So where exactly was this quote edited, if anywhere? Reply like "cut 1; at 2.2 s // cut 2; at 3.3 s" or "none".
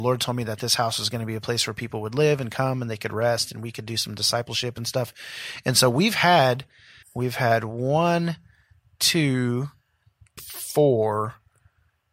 cut 1; at 7.0 s // cut 2; at 10.4 s